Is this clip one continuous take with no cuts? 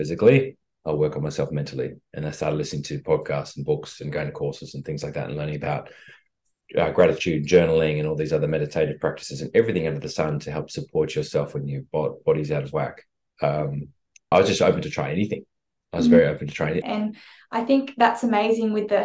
no; 2 cuts; at 14.3 s, 16.8 s

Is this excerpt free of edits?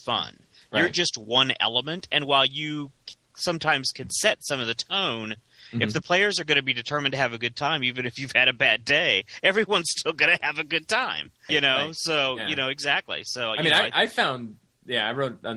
no; 1 cut; at 11.5 s

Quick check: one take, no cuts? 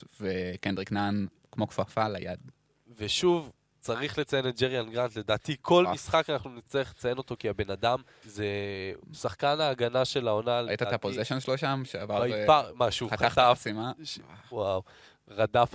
no; 1 cut; at 8.2 s

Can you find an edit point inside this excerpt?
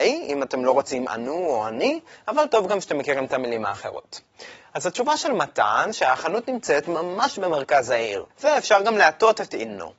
yes; 1 cut; at 8.3 s

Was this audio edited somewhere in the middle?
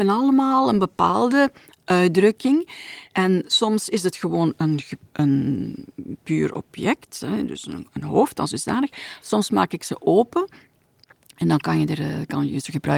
no; 0 cuts

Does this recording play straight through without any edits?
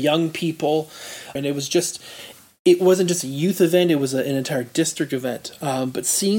no; 1 cut; at 1.4 s

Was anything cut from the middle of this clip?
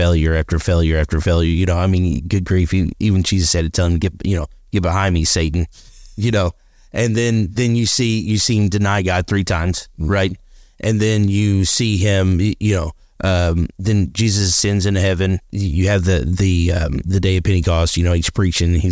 yes; 2 cuts; at 15.5 s, 17.0 s

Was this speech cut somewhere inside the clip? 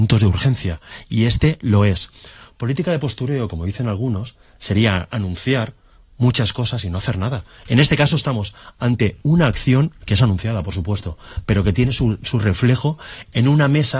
no; 0 cuts

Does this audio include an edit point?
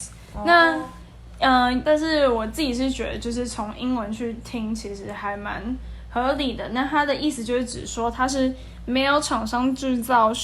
yes; 1 cut; at 1.8 s

